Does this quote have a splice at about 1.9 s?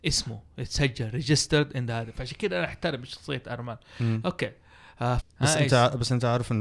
no; 1 cut; at 5.2 s

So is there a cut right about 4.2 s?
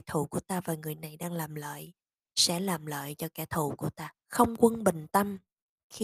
yes; 1 cut; at 4.2 s

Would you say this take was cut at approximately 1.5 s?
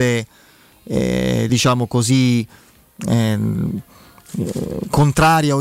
no; 0 cuts

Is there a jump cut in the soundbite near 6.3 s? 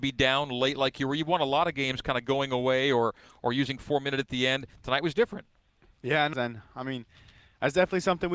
yes; 1 cut; at 6.3 s

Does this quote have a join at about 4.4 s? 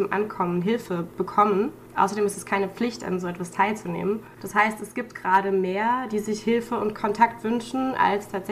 yes; 1 cut; at 4.4 s

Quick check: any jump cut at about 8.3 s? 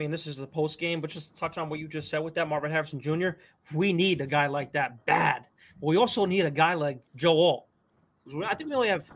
yes; 1 cut; at 8.3 s

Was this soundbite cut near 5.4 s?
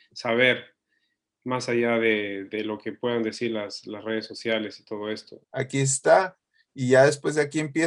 yes; 1 cut; at 5.4 s

